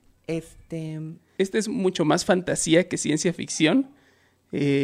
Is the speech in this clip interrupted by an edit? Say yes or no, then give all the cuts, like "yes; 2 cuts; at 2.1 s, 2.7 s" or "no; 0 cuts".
yes; 1 cut; at 1.4 s